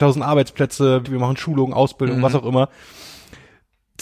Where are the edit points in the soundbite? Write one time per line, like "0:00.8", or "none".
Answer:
0:01.0